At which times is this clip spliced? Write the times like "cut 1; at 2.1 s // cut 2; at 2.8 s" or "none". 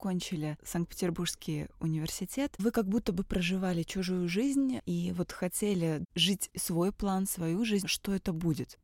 cut 1; at 7.8 s